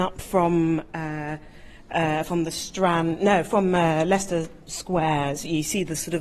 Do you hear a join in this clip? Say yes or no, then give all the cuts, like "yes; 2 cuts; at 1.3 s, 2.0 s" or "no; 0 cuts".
no; 0 cuts